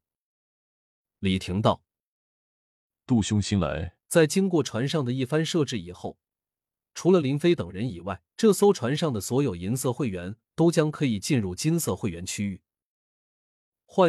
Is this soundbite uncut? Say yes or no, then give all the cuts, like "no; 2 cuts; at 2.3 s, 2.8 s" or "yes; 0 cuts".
no; 2 cuts; at 4.0 s, 8.3 s